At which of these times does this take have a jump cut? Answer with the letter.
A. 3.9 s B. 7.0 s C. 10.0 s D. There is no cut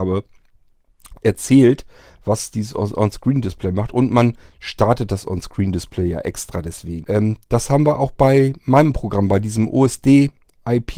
B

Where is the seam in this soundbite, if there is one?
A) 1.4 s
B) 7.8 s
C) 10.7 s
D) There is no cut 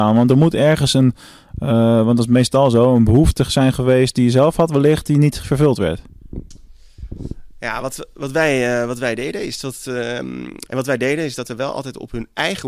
C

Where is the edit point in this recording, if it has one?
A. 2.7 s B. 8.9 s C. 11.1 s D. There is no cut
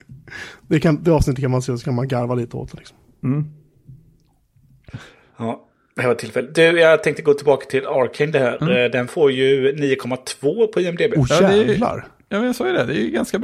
D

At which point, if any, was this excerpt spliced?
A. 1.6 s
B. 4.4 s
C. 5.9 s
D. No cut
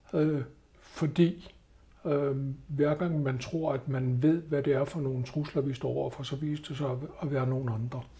D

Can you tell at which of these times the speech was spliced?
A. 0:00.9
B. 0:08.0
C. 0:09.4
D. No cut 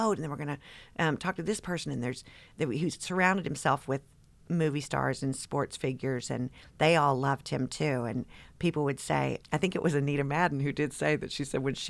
C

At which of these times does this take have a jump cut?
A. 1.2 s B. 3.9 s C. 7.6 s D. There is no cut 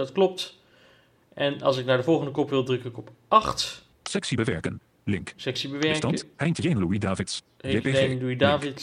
B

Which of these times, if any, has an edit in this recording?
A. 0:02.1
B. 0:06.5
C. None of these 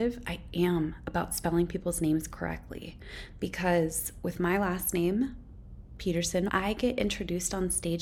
B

